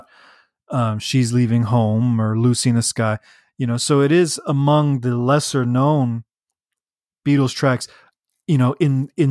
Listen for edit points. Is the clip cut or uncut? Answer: uncut